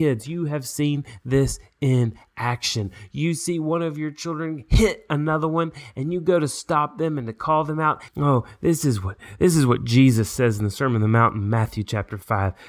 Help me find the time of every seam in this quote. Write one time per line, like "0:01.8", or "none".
0:08.1